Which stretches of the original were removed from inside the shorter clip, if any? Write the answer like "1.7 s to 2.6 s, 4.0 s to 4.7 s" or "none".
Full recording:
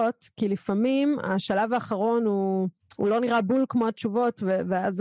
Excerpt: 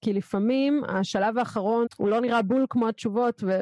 2.2 s to 2.8 s